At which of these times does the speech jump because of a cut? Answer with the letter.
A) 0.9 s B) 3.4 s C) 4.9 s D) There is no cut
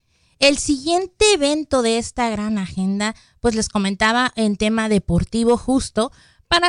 D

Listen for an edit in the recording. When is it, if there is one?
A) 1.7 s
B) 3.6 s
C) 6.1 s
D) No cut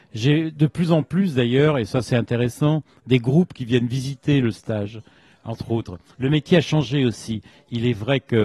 C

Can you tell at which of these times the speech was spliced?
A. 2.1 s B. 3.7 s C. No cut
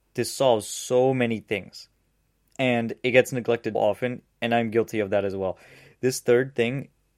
B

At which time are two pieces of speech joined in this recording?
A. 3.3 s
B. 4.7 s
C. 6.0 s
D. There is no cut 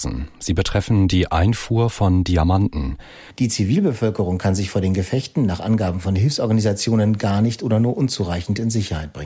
A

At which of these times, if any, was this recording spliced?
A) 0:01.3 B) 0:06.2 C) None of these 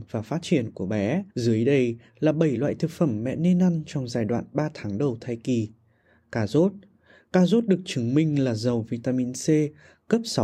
A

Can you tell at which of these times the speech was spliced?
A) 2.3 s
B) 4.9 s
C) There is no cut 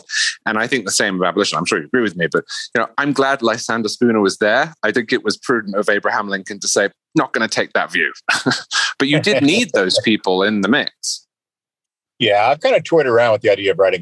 B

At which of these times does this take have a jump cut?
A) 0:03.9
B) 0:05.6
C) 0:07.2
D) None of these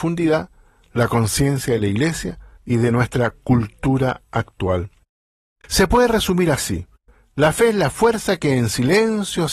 D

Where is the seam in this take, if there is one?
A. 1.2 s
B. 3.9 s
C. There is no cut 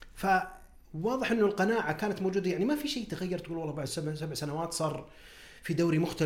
B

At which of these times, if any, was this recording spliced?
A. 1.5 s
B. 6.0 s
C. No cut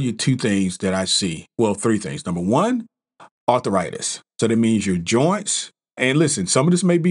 B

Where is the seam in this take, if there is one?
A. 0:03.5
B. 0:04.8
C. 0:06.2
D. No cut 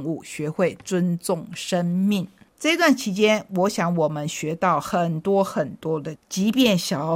C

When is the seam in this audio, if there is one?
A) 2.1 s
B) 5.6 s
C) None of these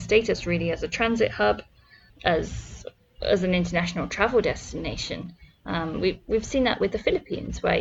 A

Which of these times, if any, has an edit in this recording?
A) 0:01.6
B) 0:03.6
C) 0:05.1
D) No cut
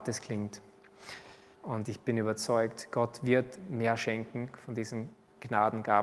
A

